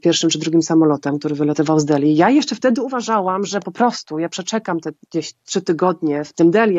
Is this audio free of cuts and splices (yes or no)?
yes